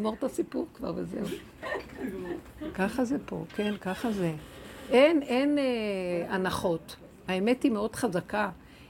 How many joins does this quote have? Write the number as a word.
zero